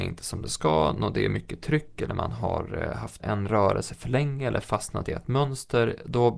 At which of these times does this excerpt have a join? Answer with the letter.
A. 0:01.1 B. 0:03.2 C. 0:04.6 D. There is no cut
B